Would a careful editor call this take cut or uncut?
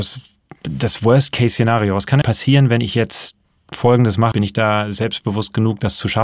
cut